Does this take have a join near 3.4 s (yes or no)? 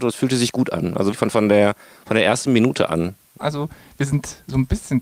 yes